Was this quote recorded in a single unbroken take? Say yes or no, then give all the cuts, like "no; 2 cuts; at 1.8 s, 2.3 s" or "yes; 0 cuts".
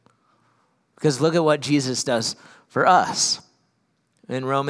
no; 1 cut; at 0.9 s